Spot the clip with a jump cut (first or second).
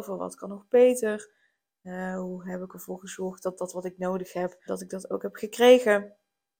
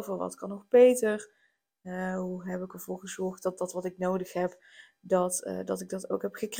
first